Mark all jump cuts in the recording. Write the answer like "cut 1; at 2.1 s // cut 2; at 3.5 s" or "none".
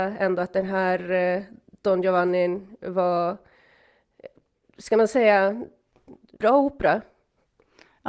cut 1; at 6.4 s

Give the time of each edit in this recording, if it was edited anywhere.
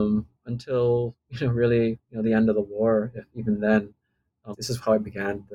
cut 1; at 4.5 s

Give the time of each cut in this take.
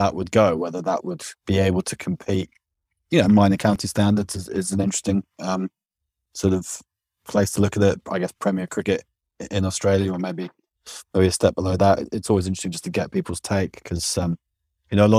cut 1; at 1.4 s

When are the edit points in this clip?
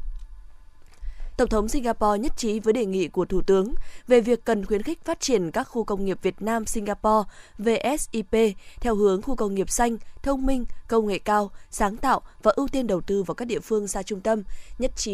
cut 1; at 1.4 s

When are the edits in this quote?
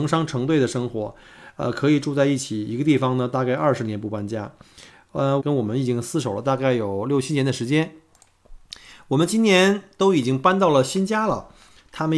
cut 1; at 5.4 s

